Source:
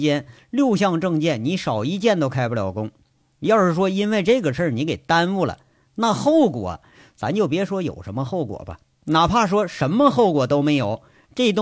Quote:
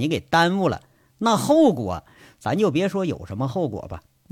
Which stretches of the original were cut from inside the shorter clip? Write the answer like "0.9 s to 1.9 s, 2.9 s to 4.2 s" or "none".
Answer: none